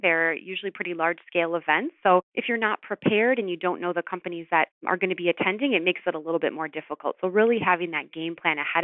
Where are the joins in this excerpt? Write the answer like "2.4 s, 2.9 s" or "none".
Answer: none